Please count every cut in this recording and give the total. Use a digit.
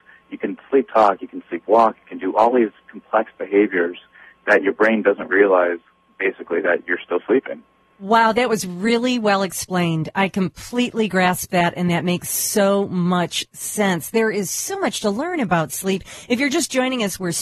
0